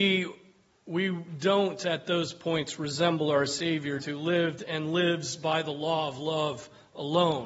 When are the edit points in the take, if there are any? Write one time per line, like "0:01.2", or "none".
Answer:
0:04.0